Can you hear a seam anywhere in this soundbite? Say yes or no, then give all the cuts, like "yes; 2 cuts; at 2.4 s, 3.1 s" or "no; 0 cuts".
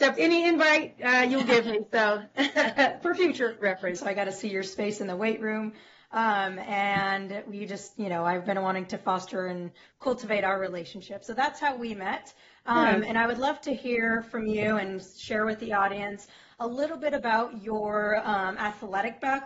yes; 1 cut; at 4.0 s